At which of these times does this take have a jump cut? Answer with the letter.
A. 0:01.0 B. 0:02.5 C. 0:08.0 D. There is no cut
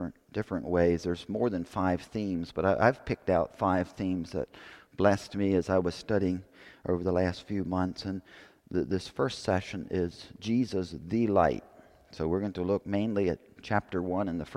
D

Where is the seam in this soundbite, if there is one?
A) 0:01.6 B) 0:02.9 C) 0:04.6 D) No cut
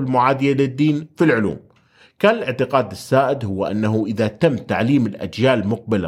D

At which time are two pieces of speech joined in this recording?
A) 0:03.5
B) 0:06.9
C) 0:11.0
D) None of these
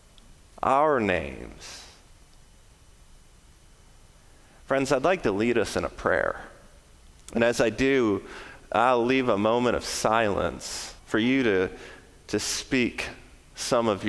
C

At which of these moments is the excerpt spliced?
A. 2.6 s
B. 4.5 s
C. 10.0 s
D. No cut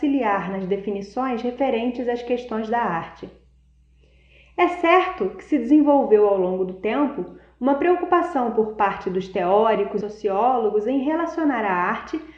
C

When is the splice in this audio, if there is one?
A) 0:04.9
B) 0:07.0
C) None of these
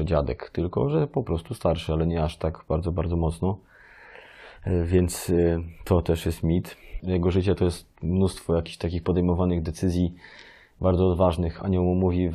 B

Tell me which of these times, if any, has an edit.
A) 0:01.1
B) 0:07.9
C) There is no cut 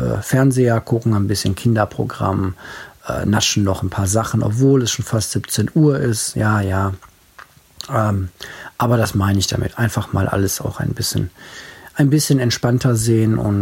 C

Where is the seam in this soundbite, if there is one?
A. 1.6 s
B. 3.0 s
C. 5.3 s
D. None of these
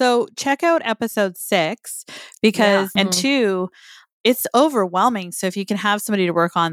B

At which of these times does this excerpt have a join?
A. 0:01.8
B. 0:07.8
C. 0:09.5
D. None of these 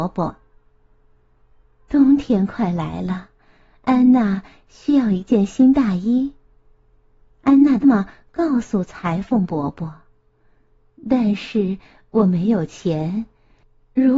B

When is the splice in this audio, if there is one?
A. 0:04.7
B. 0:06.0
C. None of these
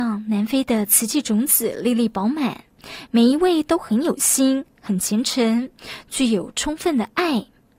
C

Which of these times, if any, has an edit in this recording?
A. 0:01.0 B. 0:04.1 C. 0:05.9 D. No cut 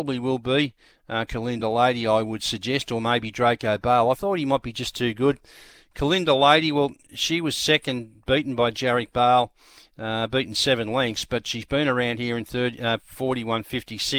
D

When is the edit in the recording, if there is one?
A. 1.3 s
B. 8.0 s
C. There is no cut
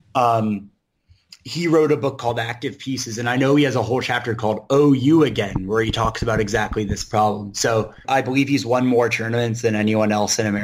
B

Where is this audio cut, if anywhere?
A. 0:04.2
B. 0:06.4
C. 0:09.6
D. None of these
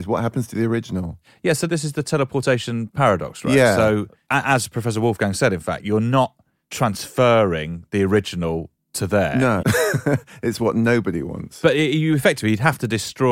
C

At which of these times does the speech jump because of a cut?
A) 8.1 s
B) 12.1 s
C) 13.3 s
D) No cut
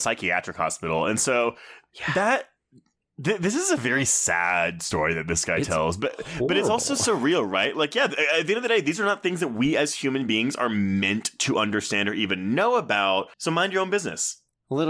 C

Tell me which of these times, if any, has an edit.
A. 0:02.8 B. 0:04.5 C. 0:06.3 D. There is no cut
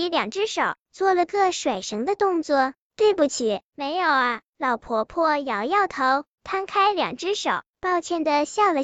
A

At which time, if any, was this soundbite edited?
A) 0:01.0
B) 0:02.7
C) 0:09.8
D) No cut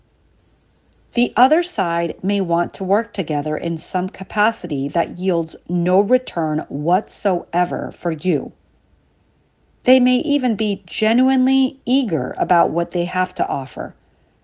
C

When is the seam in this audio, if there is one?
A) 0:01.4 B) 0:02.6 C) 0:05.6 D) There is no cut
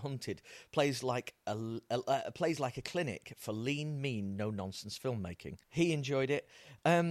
C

